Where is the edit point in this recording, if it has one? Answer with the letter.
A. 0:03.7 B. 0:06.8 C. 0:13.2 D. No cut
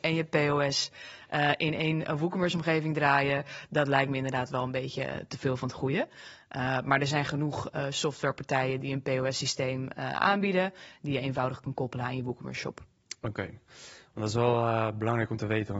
D